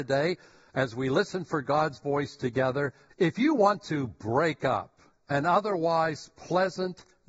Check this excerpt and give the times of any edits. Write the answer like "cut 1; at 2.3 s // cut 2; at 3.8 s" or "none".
cut 1; at 3.1 s